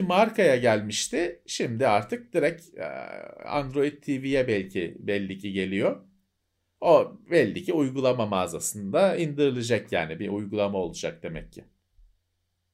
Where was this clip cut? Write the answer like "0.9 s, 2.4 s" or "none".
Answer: none